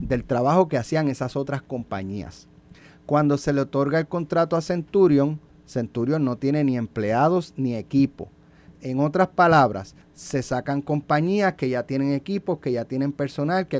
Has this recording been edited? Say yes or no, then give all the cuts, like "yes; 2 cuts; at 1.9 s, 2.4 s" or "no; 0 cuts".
yes; 2 cuts; at 8.8 s, 10.0 s